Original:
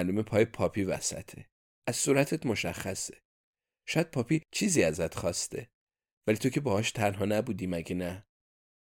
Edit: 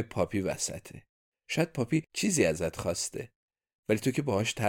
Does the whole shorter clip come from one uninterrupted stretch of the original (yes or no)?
no